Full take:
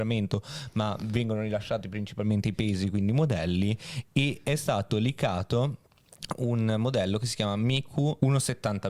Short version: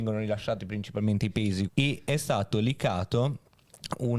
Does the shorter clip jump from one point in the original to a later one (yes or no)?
yes